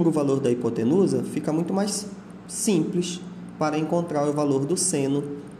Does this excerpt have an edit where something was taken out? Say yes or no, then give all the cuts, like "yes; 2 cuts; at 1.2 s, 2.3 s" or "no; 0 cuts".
no; 0 cuts